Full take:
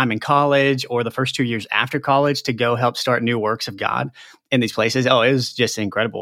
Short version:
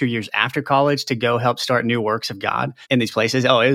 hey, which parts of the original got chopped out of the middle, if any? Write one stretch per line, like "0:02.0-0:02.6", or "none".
0:04.2-0:04.4